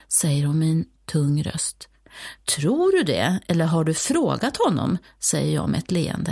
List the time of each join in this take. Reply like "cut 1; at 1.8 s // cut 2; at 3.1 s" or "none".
none